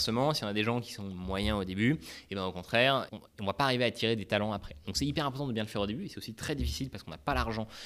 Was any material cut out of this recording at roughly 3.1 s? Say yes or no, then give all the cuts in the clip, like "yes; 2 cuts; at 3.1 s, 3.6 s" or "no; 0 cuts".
yes; 1 cut; at 3.1 s